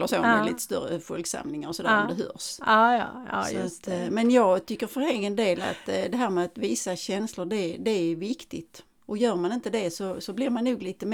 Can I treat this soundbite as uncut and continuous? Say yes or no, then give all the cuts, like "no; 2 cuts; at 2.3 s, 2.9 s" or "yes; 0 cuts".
yes; 0 cuts